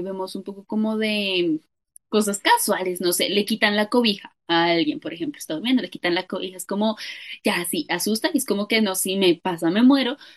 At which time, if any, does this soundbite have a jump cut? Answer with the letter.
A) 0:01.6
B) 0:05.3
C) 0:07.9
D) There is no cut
D